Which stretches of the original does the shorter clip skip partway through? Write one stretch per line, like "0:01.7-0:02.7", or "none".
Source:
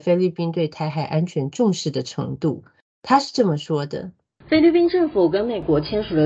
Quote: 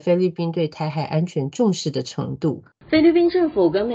0:02.7-0:04.3